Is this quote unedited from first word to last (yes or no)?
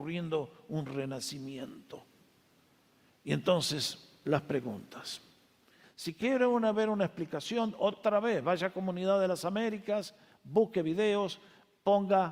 no